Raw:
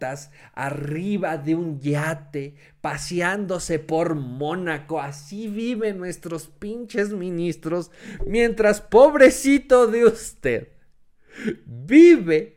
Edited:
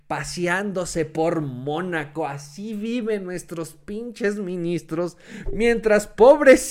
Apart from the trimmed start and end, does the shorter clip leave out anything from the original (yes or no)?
no